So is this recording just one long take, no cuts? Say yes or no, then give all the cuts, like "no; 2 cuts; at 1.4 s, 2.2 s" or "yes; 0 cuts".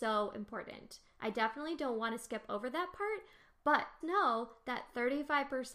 no; 1 cut; at 4.0 s